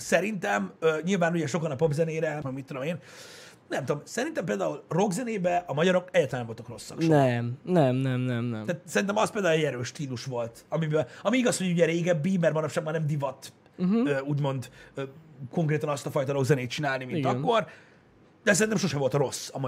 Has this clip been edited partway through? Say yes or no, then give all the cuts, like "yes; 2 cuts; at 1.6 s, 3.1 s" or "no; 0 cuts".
yes; 1 cut; at 2.4 s